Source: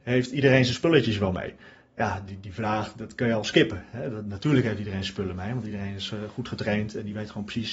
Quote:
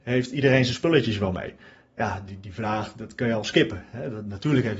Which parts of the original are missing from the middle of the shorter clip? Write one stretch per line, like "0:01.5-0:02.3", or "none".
none